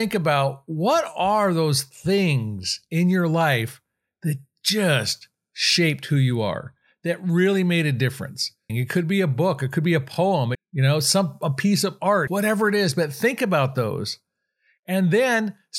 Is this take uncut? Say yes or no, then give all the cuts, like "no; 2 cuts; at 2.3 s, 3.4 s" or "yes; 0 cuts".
no; 3 cuts; at 8.7 s, 10.5 s, 12.3 s